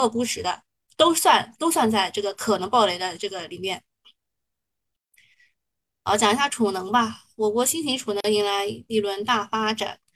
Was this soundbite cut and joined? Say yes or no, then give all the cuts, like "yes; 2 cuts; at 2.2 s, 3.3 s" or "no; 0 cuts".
no; 0 cuts